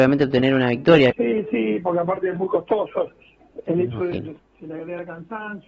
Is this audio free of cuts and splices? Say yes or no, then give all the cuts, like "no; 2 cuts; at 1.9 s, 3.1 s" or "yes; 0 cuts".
no; 2 cuts; at 1.1 s, 4.4 s